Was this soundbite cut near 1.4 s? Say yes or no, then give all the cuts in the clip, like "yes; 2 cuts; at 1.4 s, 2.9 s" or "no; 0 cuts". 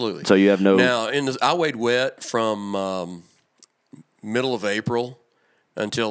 no; 0 cuts